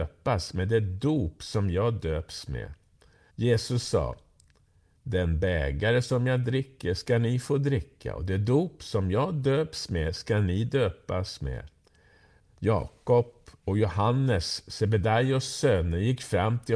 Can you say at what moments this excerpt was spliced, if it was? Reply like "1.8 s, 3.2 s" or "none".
3.3 s, 12.4 s